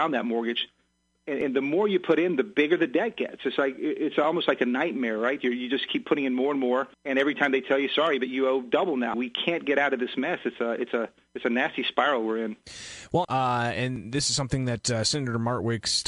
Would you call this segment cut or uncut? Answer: cut